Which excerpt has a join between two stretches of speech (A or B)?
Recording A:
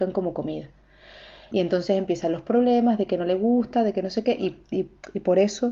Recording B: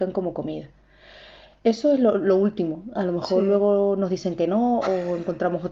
A